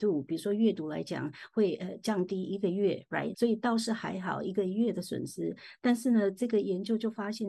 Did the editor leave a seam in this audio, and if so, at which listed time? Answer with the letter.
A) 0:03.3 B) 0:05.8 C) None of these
A